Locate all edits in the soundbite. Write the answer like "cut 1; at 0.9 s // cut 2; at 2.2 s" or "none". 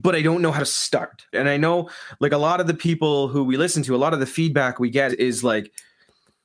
cut 1; at 1.3 s // cut 2; at 5.1 s